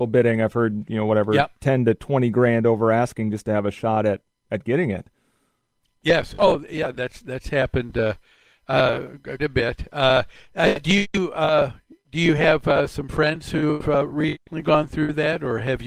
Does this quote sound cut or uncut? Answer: cut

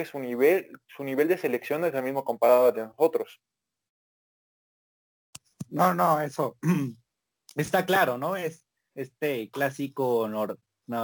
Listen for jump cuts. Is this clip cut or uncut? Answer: uncut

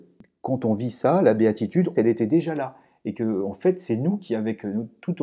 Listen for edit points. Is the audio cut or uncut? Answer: cut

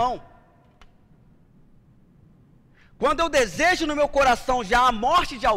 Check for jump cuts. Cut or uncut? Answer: uncut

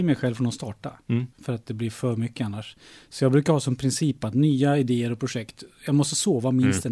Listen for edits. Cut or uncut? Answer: cut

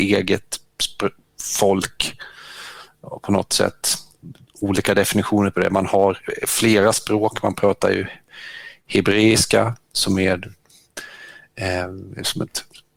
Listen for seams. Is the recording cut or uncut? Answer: uncut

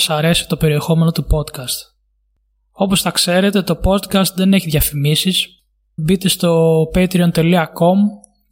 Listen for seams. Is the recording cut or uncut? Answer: cut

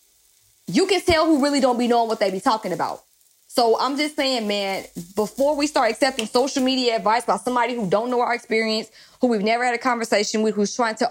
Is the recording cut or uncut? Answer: uncut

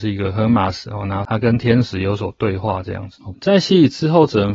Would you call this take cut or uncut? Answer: cut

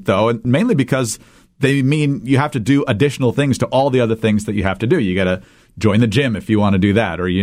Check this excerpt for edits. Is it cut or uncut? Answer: uncut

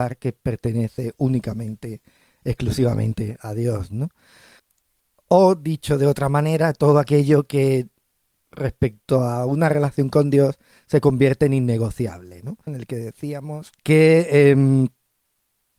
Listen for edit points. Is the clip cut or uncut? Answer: cut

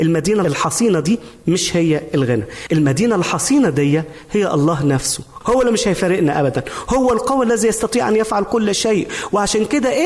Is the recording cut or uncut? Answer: uncut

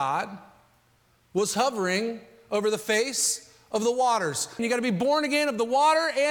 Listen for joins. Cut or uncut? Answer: cut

